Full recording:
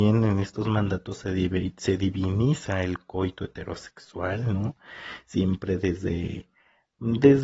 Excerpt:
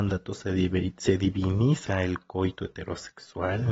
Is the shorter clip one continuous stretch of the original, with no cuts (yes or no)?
yes